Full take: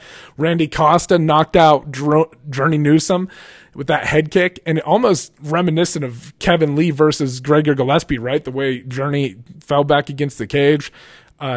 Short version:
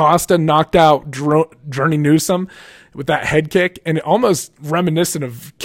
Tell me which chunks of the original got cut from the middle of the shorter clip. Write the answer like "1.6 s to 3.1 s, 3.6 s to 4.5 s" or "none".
none

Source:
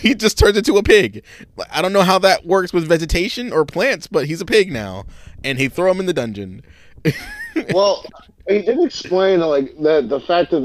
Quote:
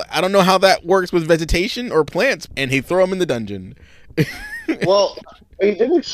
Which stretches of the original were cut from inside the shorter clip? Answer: 4.1 s to 5.4 s

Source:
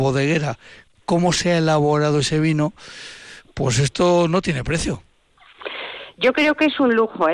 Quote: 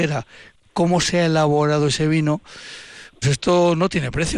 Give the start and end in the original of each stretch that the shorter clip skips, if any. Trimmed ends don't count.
3.5 s to 3.7 s

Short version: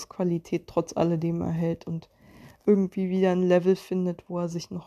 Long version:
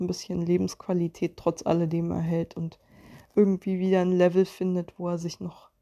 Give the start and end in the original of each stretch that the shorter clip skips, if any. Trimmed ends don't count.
none

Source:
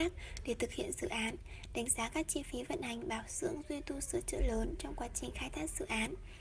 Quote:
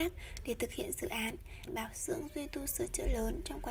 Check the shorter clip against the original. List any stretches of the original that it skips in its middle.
1.7 s to 3.0 s

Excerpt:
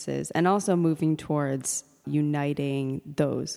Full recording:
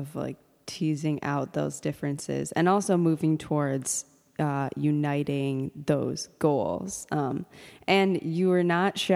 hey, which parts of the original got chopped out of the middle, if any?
4.3 s to 4.7 s

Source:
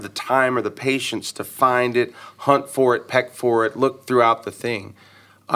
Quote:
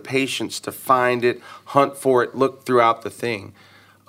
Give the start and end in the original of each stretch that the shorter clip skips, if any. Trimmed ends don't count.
3.0 s to 3.7 s

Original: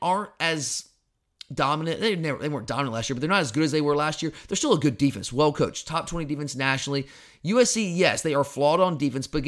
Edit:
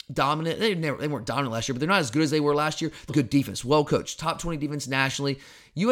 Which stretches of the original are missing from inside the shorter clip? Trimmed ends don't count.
4.5 s to 4.8 s

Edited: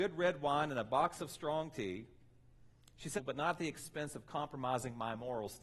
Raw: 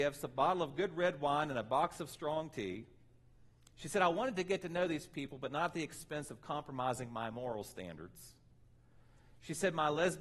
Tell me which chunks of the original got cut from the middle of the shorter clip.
3.9 s to 5.3 s

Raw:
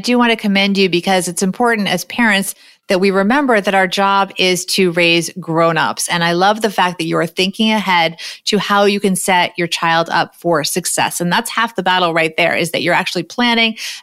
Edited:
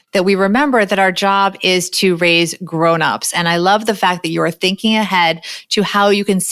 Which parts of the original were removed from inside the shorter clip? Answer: none

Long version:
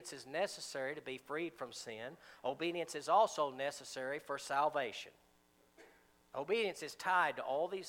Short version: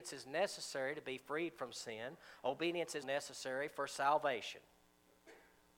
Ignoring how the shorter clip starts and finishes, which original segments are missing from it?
3.0 s to 3.5 s

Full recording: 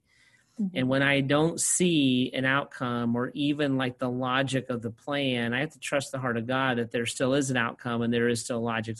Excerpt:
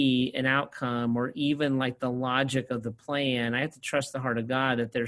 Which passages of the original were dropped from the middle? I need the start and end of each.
none

